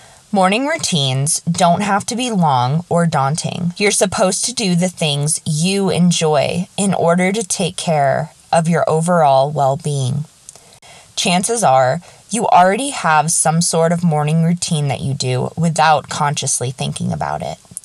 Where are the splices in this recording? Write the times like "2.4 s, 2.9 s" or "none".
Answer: none